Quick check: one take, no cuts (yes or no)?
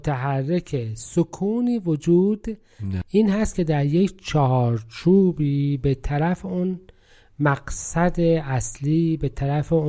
no